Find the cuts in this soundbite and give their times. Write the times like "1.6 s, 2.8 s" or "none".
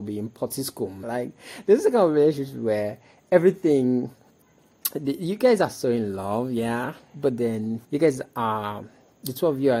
1.0 s, 7.8 s